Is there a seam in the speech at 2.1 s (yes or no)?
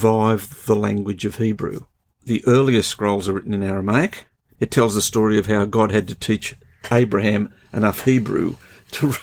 yes